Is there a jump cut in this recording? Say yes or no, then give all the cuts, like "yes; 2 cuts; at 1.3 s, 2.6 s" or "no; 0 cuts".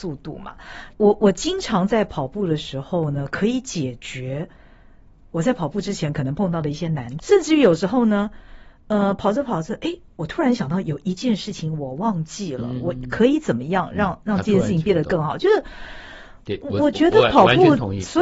yes; 2 cuts; at 0.9 s, 7.2 s